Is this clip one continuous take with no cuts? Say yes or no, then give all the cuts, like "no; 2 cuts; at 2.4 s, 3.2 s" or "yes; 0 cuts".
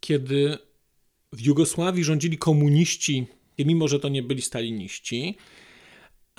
no; 1 cut; at 3.6 s